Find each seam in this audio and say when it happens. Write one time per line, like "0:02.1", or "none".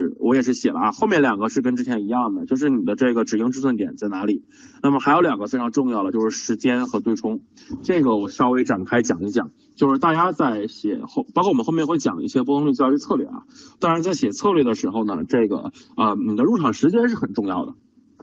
none